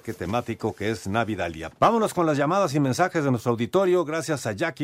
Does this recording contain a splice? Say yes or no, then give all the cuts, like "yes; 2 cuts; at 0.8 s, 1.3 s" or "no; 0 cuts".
yes; 1 cut; at 1.7 s